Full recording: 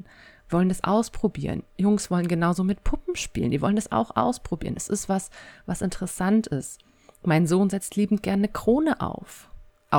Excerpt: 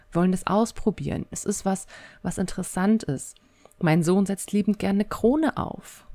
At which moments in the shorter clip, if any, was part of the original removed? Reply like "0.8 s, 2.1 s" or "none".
1.3 s